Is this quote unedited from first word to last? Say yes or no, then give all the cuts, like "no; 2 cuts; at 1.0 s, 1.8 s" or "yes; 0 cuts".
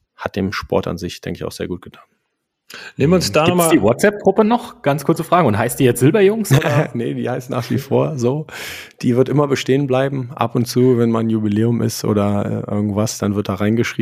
yes; 0 cuts